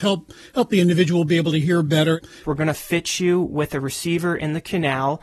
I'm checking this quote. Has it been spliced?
yes; 1 cut; at 2.4 s

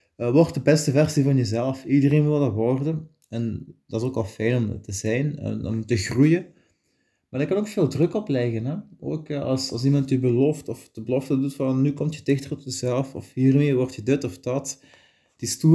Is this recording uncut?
yes; 0 cuts

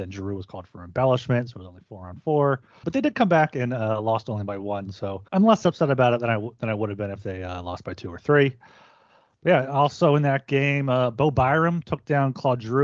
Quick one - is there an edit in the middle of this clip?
yes; 2 cuts; at 2.8 s, 5.3 s

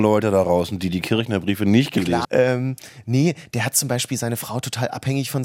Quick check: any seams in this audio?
yes; 1 cut; at 2.2 s

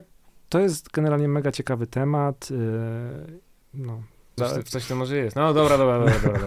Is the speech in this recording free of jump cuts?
no; 1 cut; at 4.4 s

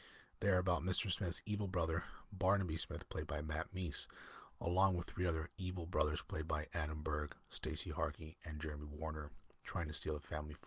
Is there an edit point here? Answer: no; 0 cuts

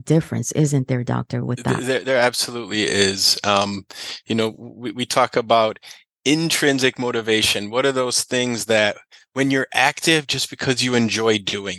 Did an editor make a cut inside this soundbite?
no; 0 cuts

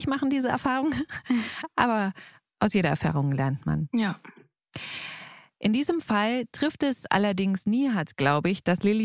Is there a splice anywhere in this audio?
no; 0 cuts

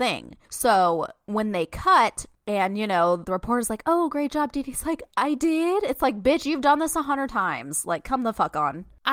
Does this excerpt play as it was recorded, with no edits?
no; 1 cut; at 3.2 s

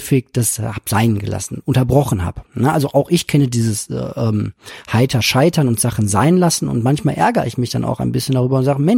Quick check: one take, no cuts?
yes; 0 cuts

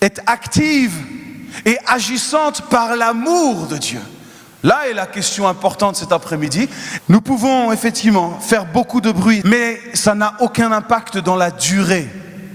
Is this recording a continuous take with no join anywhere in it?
no; 2 cuts; at 7.0 s, 9.4 s

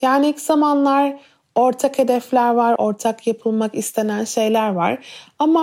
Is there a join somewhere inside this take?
yes; 1 cut; at 2.8 s

